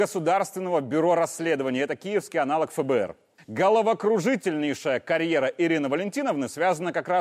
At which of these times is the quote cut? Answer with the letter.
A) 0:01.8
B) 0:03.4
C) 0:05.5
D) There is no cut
B